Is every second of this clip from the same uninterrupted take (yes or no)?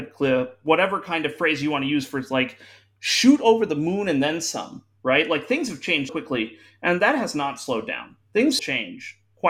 no